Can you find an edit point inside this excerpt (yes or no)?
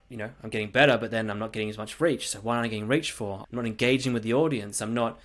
yes